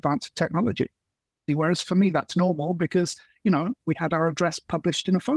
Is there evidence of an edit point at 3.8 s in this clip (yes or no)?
yes